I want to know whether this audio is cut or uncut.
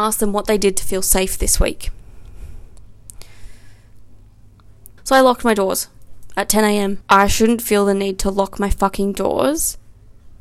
cut